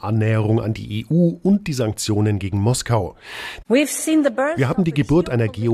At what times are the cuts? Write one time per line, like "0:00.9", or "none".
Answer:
0:03.6